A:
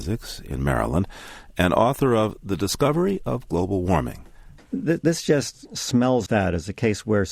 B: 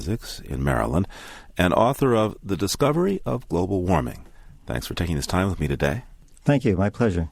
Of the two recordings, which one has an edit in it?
A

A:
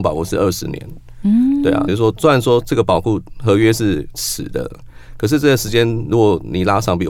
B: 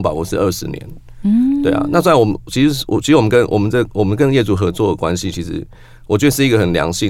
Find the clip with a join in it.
A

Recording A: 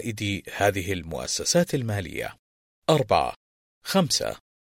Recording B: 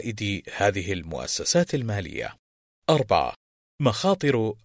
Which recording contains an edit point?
A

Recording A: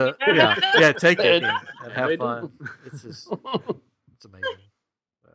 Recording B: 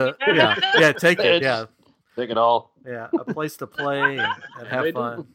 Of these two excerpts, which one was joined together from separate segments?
A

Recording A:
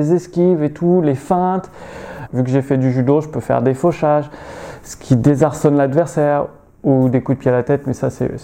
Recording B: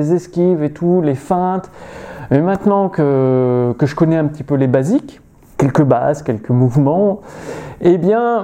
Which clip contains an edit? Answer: A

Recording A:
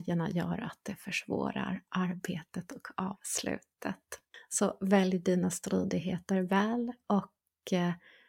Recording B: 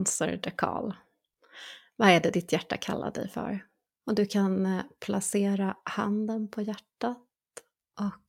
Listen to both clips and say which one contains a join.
B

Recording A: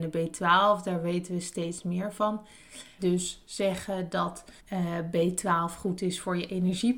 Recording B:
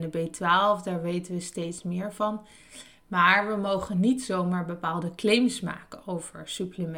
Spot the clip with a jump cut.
A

